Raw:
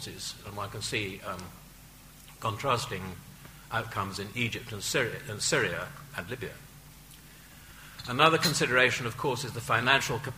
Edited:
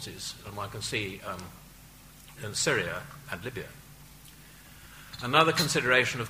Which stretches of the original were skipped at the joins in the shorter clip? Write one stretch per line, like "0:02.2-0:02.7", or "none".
0:02.4-0:05.2